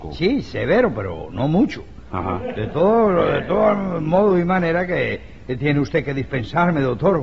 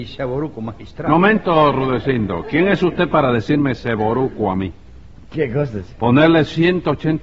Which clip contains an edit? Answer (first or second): second